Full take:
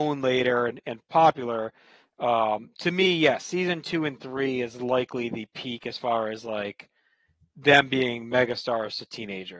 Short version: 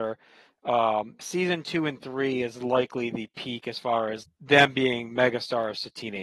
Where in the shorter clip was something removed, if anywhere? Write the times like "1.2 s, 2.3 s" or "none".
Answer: 1.2 s, 4.2 s